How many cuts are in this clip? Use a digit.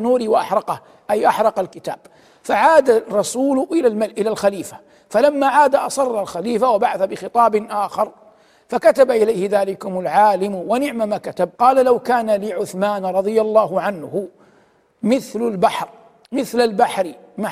1